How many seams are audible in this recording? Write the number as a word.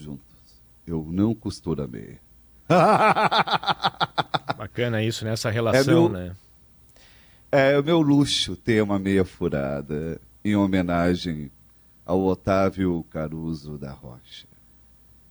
zero